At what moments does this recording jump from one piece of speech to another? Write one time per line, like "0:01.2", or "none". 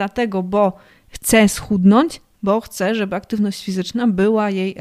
0:02.3